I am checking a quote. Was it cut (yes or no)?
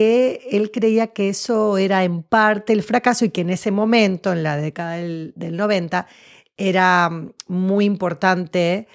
no